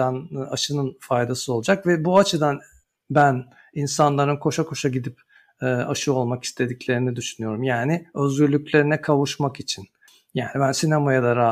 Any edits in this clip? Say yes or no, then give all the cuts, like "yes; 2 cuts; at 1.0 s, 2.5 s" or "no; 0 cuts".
no; 0 cuts